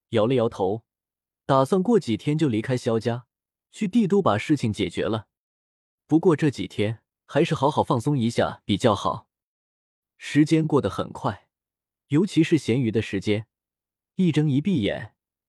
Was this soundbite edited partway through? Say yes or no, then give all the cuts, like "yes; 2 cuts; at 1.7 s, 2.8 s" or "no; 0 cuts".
no; 0 cuts